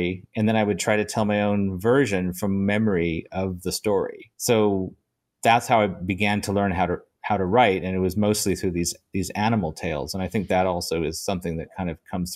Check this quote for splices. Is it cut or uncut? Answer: cut